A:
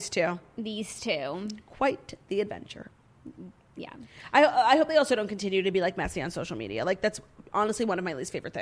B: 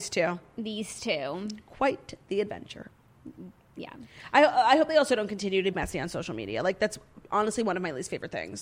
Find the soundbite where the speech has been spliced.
B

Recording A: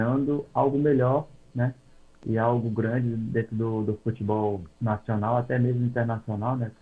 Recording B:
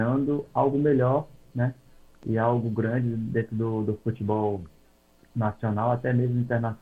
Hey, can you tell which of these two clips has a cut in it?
A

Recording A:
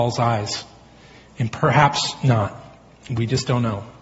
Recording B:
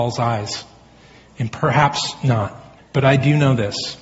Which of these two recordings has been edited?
B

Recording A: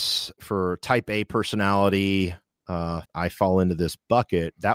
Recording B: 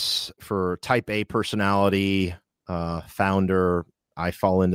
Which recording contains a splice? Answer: A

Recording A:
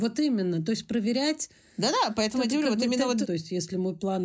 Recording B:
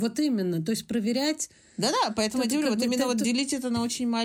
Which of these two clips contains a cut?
A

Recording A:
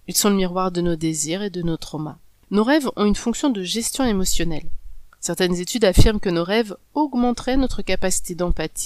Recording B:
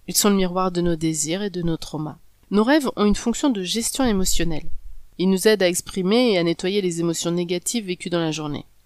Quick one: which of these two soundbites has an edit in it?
A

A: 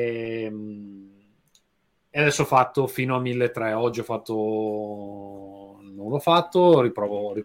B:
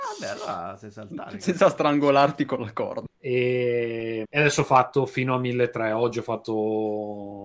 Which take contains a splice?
B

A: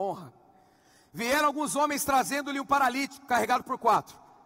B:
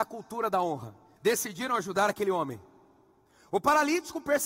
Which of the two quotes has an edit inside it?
B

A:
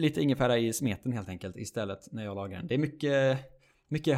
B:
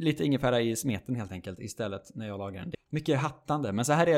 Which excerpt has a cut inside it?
B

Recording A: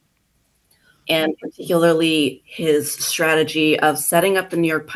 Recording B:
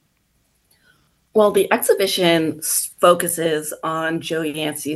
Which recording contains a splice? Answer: A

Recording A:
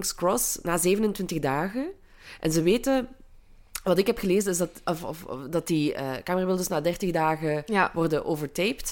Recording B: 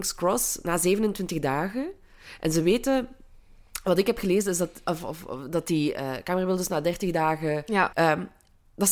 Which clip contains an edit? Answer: B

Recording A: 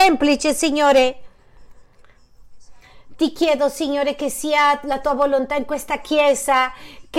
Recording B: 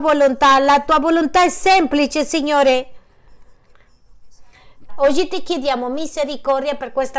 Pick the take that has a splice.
B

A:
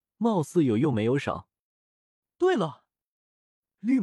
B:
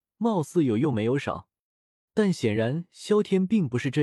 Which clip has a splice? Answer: B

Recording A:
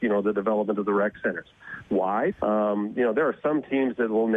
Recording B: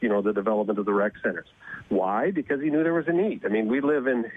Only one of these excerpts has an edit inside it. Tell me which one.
A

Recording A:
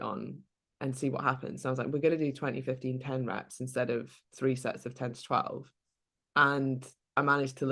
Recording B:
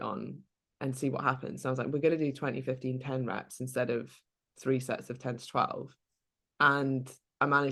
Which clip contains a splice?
A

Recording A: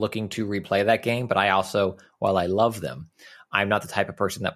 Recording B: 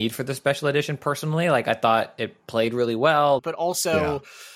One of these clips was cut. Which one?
B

